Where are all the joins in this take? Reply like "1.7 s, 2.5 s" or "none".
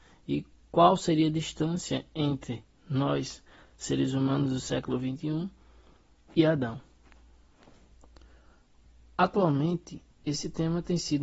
none